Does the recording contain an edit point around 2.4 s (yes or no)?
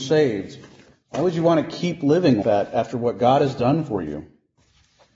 yes